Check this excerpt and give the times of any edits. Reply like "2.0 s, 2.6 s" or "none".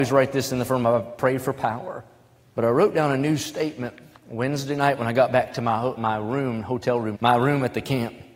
2.5 s, 6.0 s, 7.1 s